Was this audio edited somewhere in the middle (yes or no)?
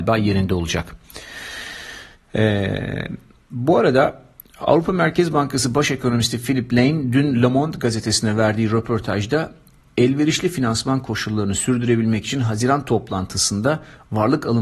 no